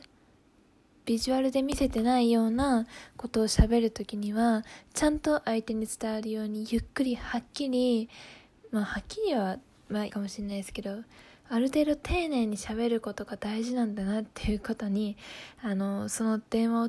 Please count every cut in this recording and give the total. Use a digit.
1